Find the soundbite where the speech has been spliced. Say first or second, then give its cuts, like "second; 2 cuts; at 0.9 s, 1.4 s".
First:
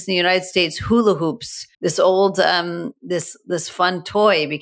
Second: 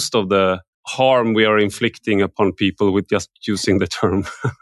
first; 1 cut; at 1.7 s